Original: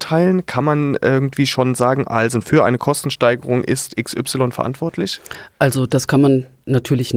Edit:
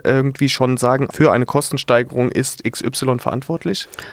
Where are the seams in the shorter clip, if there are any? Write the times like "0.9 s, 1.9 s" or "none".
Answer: 1.1 s